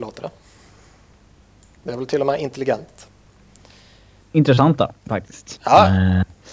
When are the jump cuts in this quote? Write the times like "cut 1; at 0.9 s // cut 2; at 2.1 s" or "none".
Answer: cut 1; at 4.2 s // cut 2; at 5.6 s